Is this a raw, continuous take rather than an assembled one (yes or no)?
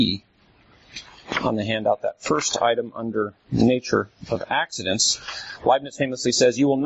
yes